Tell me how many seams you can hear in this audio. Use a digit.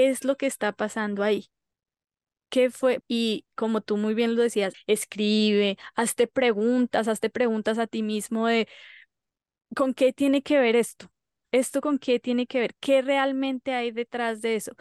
2